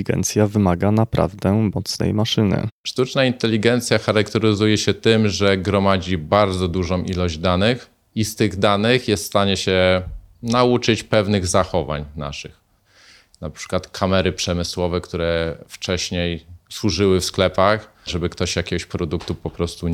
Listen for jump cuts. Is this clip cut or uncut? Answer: cut